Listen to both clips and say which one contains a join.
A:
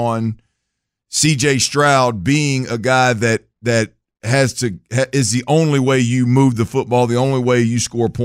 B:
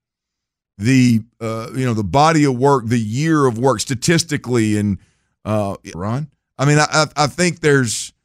B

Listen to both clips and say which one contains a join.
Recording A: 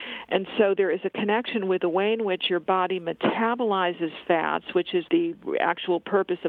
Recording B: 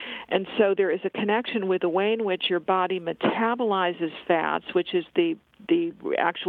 A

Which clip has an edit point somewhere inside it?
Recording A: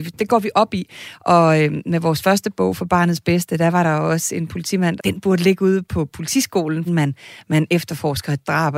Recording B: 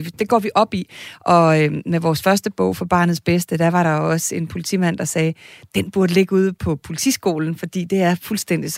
A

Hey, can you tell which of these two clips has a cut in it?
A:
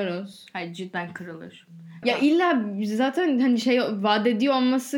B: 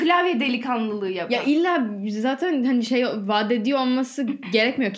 A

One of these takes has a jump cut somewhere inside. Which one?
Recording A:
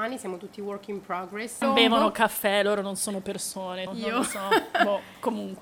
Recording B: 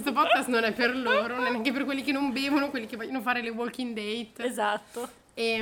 A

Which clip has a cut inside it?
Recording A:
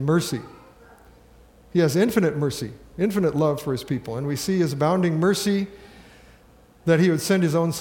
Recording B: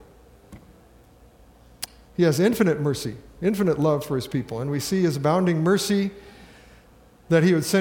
B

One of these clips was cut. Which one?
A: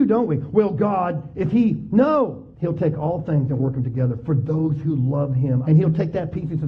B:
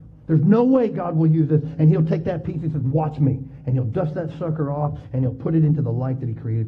A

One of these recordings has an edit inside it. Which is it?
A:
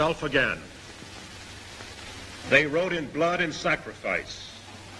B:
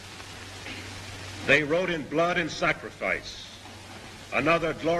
A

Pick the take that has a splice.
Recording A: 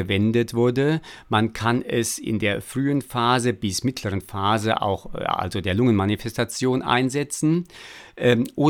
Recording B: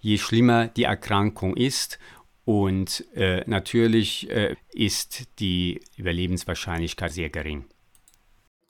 B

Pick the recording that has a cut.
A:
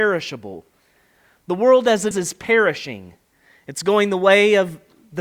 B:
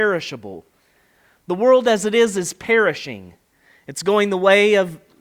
A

